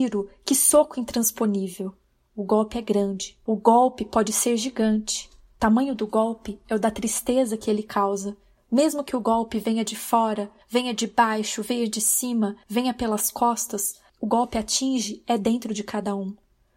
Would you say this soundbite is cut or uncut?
uncut